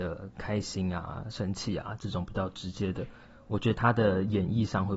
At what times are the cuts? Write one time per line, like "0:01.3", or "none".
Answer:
none